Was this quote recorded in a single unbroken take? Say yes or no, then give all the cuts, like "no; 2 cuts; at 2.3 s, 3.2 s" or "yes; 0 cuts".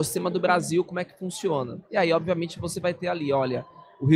yes; 0 cuts